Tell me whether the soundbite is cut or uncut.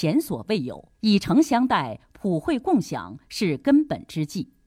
cut